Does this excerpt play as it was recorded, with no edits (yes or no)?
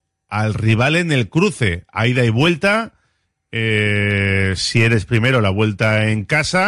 yes